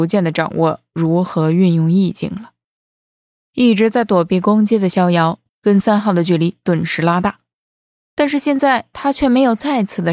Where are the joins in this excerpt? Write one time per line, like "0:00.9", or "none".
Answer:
0:05.5